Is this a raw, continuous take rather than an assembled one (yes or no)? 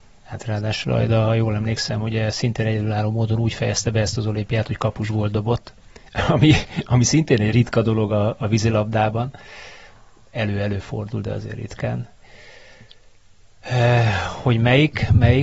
yes